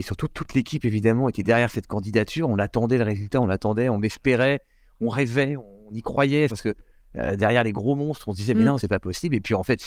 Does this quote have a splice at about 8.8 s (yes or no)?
yes